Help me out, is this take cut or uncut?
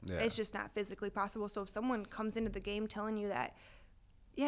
uncut